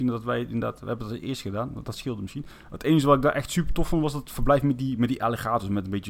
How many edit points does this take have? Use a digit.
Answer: 0